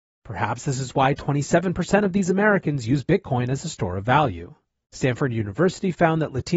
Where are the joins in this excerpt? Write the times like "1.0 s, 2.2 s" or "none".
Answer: 4.8 s